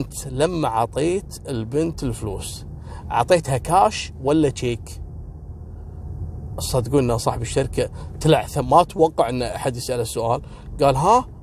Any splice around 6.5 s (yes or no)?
no